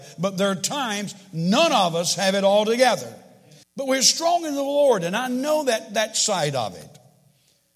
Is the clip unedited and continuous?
no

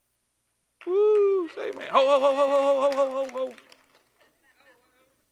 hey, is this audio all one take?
yes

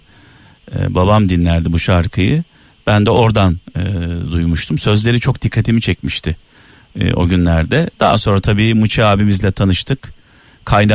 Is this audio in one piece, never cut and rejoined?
yes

